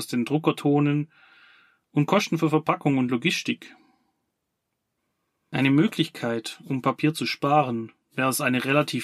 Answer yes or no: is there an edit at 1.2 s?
no